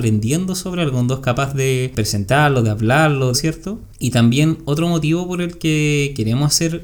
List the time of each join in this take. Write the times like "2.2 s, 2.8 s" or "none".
3.3 s